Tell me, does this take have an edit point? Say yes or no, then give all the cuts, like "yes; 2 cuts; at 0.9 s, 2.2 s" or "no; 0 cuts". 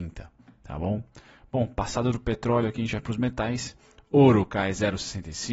no; 0 cuts